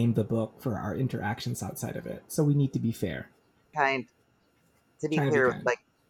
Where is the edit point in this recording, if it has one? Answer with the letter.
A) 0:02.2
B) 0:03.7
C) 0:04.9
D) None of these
B